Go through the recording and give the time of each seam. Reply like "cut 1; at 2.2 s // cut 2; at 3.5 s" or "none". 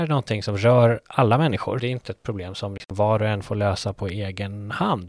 cut 1; at 1.8 s